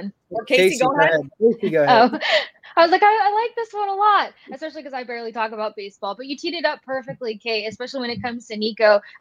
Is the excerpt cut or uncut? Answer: uncut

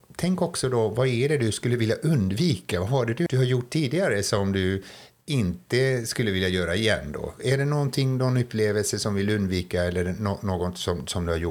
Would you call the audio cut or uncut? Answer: cut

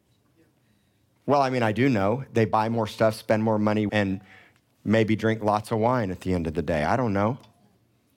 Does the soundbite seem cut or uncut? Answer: cut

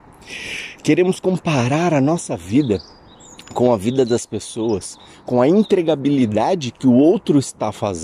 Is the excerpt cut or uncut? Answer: uncut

